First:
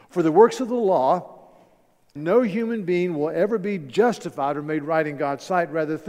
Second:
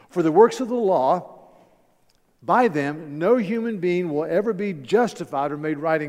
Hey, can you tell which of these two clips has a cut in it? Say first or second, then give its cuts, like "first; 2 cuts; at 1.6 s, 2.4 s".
first; 1 cut; at 2.2 s